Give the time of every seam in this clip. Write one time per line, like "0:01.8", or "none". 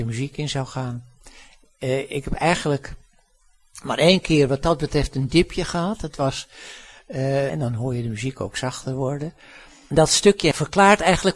0:07.5